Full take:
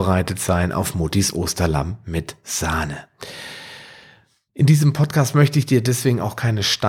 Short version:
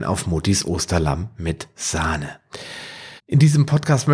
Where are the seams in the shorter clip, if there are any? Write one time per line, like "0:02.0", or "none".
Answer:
0:03.2